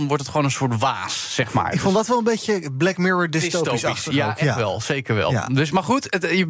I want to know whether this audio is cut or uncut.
uncut